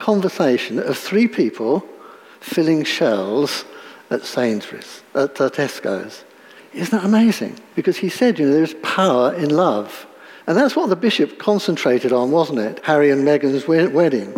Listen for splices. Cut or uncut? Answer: cut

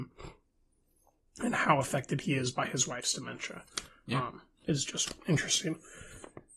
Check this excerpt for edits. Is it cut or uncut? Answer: uncut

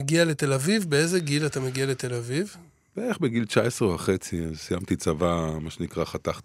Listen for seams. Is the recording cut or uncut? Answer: uncut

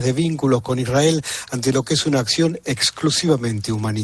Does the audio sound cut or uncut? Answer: uncut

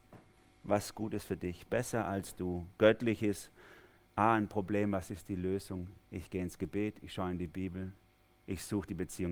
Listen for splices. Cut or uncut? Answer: uncut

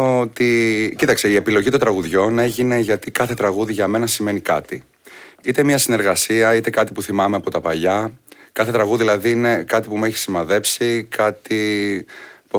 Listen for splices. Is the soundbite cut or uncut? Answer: uncut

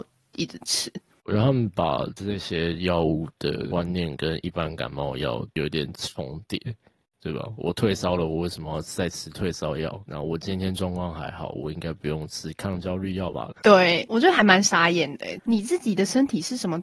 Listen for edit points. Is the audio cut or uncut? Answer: cut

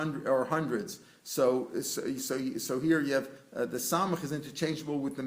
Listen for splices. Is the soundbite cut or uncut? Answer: uncut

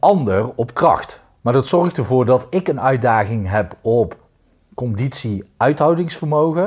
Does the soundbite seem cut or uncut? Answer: cut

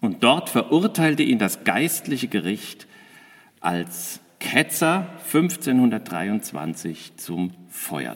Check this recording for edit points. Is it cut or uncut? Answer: uncut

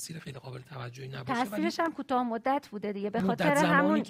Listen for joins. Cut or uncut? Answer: uncut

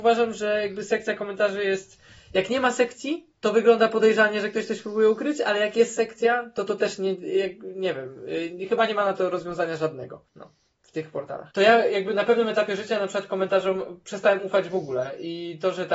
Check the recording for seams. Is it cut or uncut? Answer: cut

